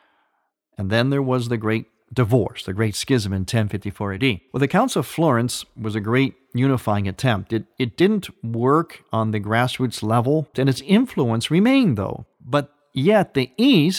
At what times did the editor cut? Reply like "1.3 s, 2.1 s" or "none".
10.5 s, 12.3 s